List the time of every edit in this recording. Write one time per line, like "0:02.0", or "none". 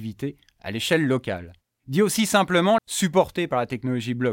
0:01.8
0:02.8